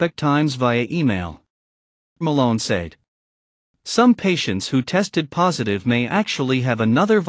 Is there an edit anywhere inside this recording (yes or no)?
yes